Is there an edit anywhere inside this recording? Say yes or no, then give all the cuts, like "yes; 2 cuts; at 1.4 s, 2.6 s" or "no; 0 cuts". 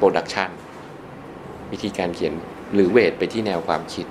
yes; 1 cut; at 2.4 s